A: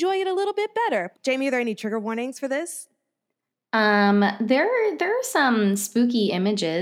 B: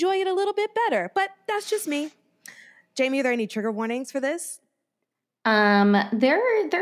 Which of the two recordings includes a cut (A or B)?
A